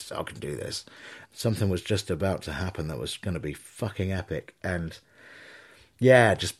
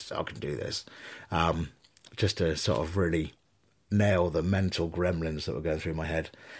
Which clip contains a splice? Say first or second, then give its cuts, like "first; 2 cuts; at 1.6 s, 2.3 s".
first; 1 cut; at 1.2 s